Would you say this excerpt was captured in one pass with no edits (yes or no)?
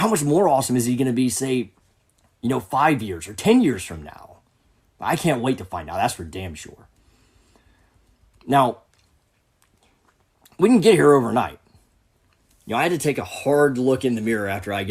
yes